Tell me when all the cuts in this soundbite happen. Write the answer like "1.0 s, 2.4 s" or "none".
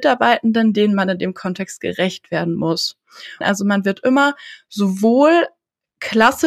3.4 s